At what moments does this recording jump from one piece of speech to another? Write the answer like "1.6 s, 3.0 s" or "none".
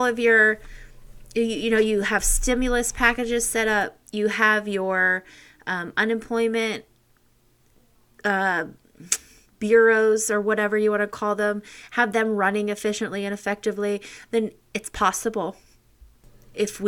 none